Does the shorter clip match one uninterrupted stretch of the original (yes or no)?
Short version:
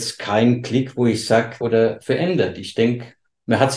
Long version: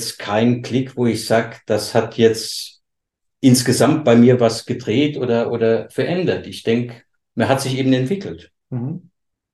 no